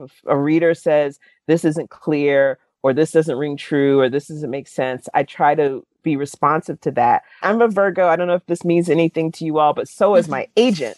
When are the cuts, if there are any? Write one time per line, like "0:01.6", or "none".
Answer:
0:07.4